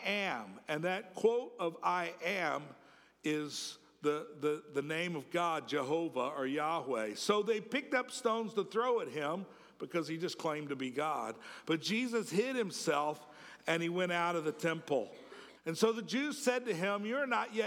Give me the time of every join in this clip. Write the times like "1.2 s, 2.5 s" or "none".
15.6 s